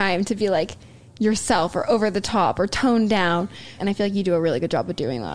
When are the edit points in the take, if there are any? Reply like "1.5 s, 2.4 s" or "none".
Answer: 3.8 s

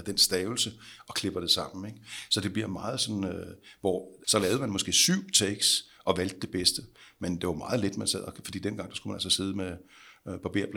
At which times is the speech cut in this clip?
4.2 s

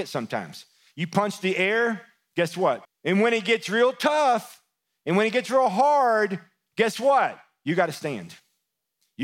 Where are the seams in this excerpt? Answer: 2.9 s

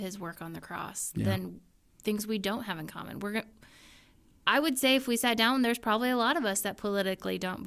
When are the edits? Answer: none

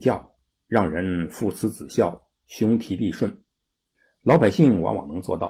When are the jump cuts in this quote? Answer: none

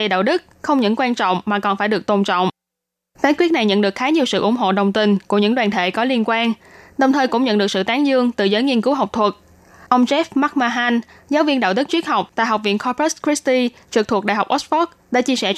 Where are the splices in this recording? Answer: none

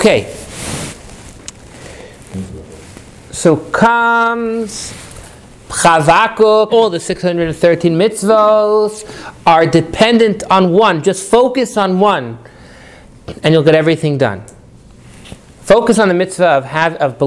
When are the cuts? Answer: 6.7 s

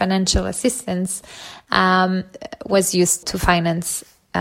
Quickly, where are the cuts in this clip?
3.2 s

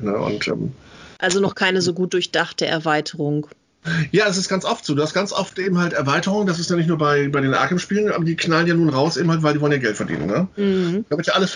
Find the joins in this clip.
none

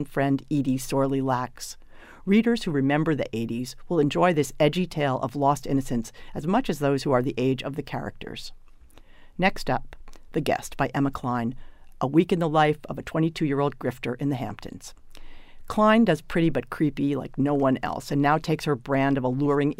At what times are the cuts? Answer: none

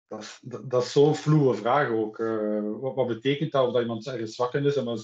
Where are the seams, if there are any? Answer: none

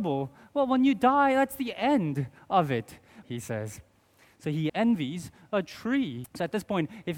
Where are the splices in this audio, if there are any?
3.2 s, 4.7 s, 6.2 s

